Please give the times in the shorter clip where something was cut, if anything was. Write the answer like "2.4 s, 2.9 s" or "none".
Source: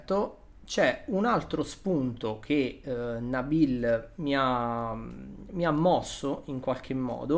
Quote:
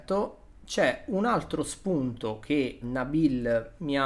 2.8 s